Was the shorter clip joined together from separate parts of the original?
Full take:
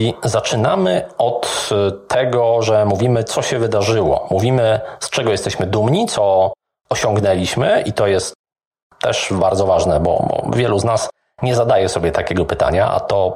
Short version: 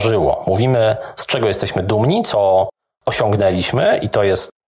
no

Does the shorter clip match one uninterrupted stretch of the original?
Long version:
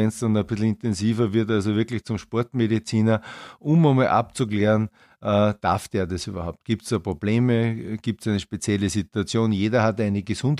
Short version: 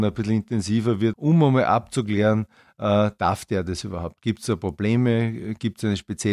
no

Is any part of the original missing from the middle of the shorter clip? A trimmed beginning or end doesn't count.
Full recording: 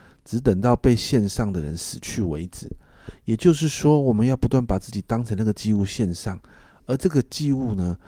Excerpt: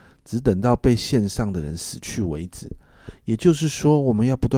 no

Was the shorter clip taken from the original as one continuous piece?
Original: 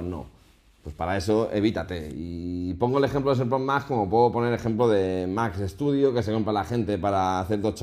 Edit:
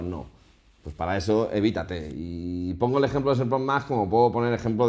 yes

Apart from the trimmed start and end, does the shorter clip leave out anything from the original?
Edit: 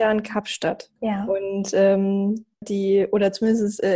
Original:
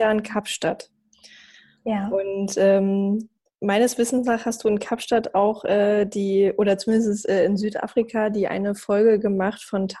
yes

